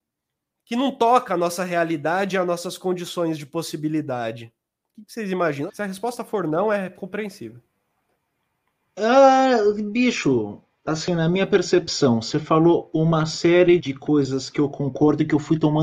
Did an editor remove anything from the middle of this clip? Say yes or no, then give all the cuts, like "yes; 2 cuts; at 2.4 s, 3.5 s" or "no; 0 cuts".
yes; 2 cuts; at 5.7 s, 13.8 s